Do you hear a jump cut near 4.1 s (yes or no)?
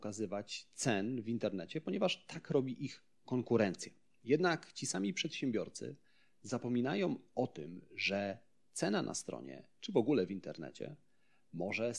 no